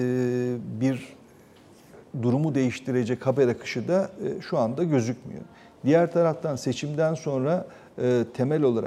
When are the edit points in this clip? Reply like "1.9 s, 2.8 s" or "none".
none